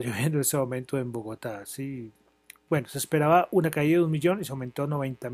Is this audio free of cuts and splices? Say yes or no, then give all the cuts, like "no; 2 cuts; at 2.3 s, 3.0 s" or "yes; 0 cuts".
no; 1 cut; at 2.7 s